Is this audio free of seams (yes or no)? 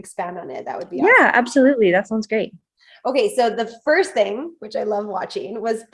yes